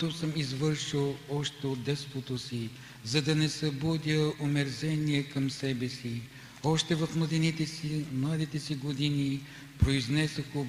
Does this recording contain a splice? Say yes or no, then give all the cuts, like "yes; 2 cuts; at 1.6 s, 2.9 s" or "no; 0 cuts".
no; 0 cuts